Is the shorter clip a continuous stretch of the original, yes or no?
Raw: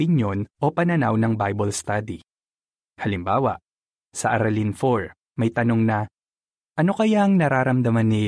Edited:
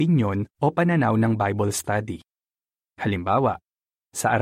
yes